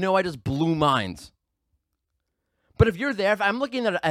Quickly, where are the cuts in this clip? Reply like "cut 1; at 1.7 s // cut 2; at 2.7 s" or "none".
none